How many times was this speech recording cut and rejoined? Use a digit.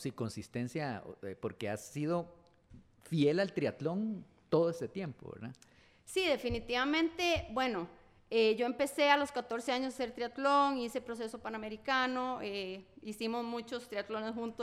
0